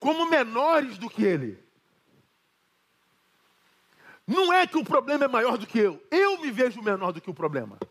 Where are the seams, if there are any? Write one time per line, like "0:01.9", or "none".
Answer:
none

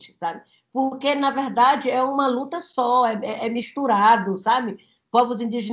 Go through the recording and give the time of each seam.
none

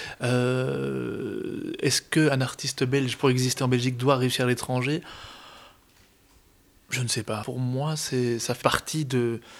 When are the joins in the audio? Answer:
0:07.4
0:08.6

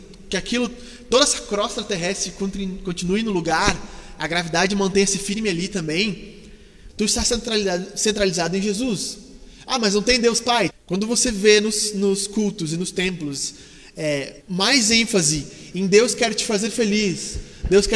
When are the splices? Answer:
0:06.9
0:10.7
0:14.4

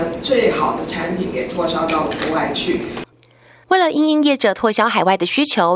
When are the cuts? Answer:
none

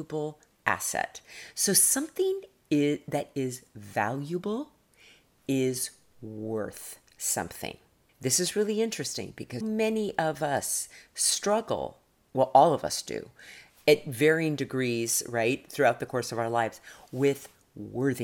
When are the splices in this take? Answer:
0:08.1
0:09.6

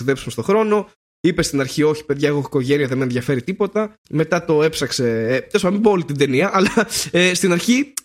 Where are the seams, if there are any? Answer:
0:04.0

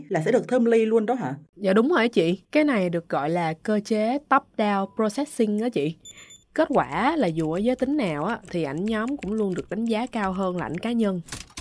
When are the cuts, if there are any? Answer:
0:01.4
0:06.4

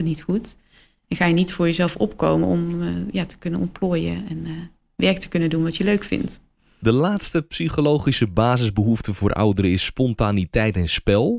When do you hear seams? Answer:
none

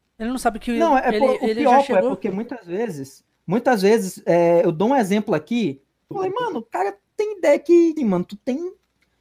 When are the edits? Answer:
0:06.1
0:08.0

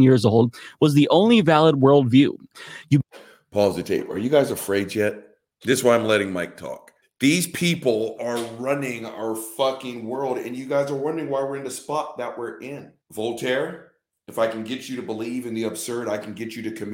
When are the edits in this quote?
0:07.0
0:13.0

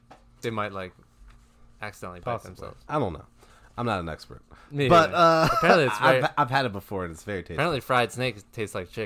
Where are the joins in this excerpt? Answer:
none

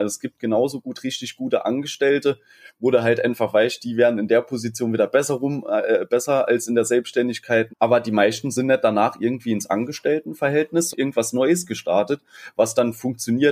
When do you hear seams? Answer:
0:07.7
0:10.9

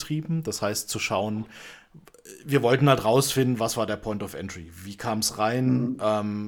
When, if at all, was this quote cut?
none

